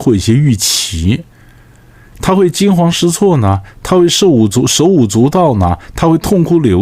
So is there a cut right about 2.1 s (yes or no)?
yes